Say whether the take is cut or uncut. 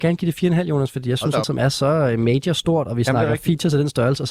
cut